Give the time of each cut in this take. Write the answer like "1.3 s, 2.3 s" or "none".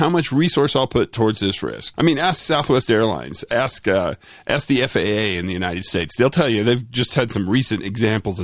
1.9 s

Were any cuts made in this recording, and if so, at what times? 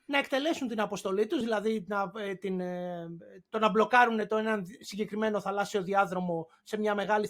none

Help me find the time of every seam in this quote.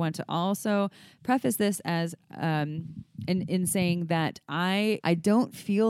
5.0 s

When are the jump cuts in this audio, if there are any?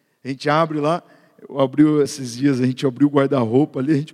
none

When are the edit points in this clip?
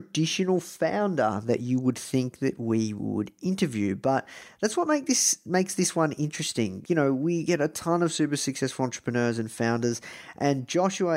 6.9 s

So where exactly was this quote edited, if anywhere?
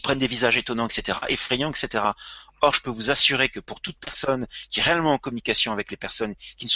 none

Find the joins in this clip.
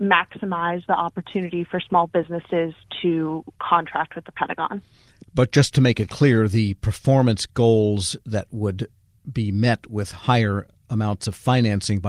none

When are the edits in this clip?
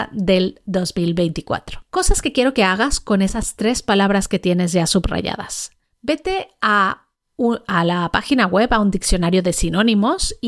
1.9 s

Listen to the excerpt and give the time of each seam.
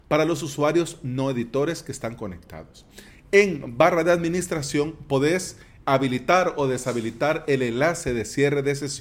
3.1 s, 5.8 s

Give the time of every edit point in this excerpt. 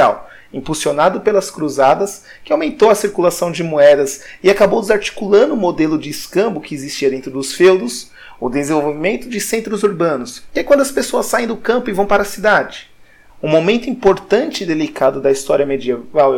10.5 s, 13.3 s

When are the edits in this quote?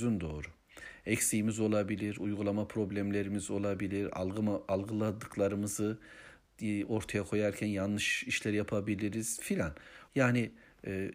10.1 s

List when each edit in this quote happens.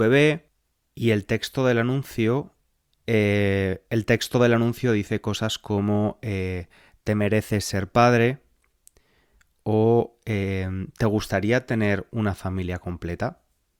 3.0 s

